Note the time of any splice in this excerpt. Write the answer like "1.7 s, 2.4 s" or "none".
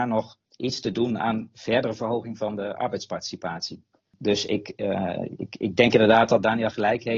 none